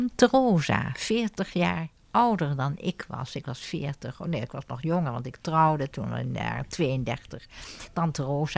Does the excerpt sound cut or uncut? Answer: uncut